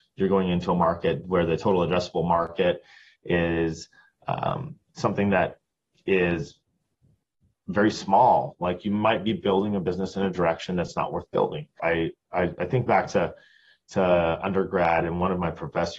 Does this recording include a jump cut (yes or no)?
yes